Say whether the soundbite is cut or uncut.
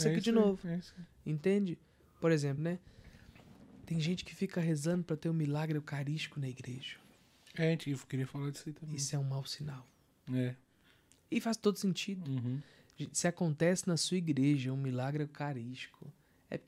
cut